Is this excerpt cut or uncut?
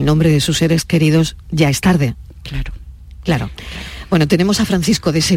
uncut